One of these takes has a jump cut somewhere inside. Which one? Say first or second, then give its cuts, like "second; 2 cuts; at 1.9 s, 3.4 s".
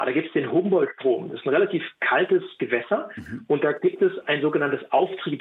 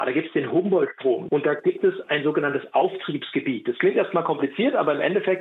second; 1 cut; at 1.3 s